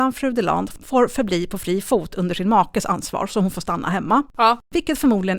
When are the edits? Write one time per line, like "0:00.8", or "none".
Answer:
none